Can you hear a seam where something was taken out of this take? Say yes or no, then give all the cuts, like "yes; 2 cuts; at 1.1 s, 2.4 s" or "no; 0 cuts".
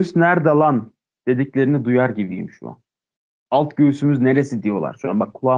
no; 0 cuts